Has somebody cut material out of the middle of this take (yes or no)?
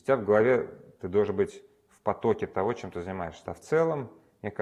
yes